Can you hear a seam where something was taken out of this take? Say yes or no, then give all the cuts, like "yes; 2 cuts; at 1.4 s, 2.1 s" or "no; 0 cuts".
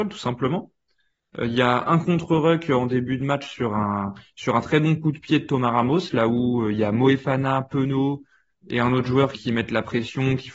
yes; 1 cut; at 9.3 s